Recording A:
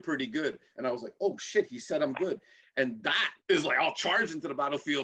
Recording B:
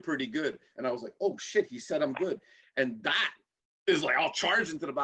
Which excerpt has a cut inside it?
A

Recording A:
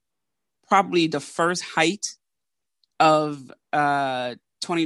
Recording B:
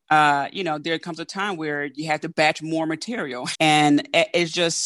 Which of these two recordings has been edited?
B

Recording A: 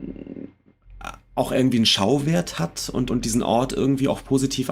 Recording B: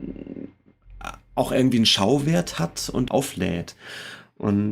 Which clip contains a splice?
B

